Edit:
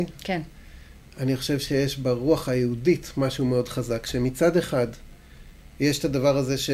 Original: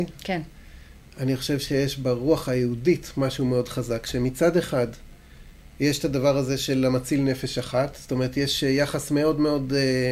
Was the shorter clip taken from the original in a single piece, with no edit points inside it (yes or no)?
yes